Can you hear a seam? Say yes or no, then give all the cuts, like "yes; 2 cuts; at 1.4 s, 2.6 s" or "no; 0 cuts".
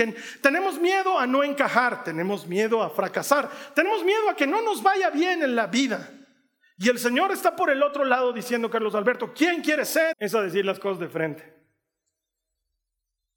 yes; 1 cut; at 10.1 s